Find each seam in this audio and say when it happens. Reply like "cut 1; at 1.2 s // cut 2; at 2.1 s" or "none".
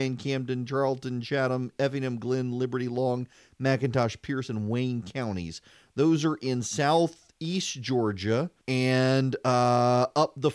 cut 1; at 8.6 s